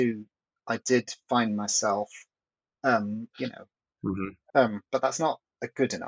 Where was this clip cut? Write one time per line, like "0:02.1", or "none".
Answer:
0:03.3
0:04.5